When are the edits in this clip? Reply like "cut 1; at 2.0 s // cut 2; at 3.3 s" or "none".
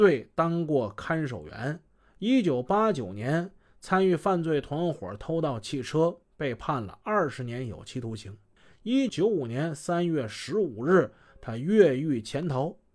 cut 1; at 9.1 s